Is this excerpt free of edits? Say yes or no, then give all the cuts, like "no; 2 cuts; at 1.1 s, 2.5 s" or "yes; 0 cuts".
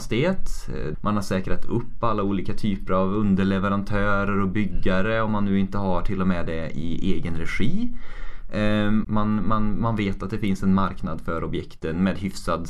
no; 2 cuts; at 0.9 s, 9.0 s